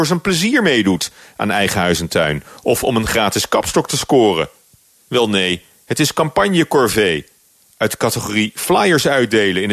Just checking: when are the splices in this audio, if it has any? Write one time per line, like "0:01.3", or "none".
none